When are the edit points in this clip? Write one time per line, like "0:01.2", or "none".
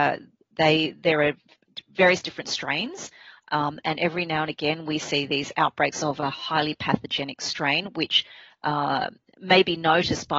none